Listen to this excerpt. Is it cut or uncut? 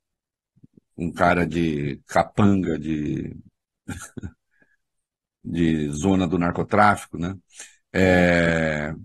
uncut